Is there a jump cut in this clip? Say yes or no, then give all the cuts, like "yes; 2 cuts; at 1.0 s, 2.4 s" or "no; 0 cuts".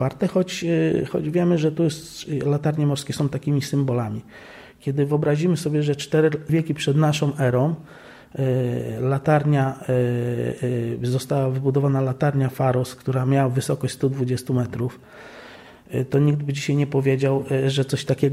yes; 1 cut; at 6.5 s